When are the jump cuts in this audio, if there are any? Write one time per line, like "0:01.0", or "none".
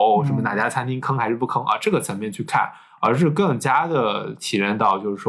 none